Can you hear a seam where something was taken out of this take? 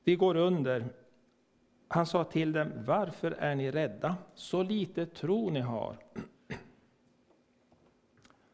no; 0 cuts

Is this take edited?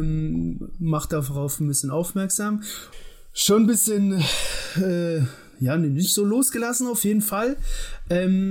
yes; 1 cut; at 2.9 s

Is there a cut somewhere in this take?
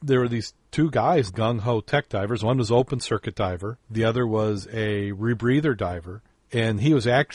yes; 2 cuts; at 1.3 s, 3.8 s

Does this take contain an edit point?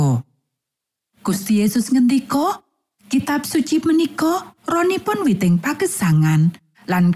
yes; 1 cut; at 3.0 s

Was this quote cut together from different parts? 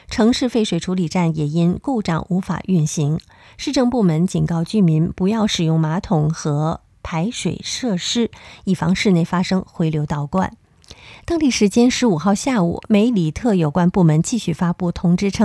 no; 0 cuts

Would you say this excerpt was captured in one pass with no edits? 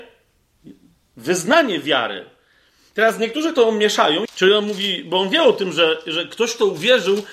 no; 1 cut; at 4.3 s

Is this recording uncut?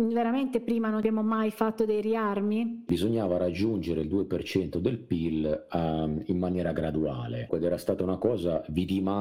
no; 2 cuts; at 2.9 s, 7.5 s

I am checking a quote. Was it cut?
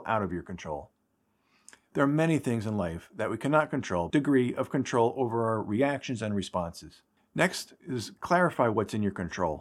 yes; 2 cuts; at 4.1 s, 7.2 s

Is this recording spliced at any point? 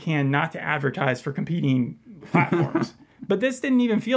no; 0 cuts

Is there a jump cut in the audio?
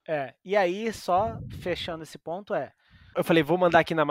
yes; 1 cut; at 3.1 s

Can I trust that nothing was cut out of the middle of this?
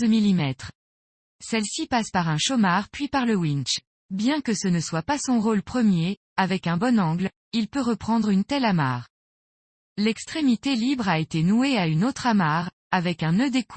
yes; 0 cuts

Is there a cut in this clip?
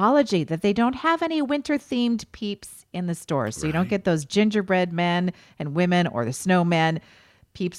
no; 0 cuts

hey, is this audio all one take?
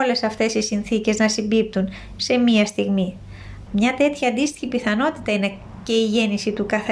no; 1 cut; at 3.7 s

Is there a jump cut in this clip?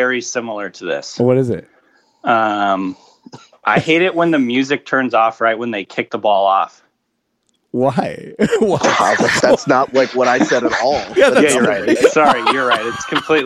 yes; 2 cuts; at 9.4 s, 12.0 s

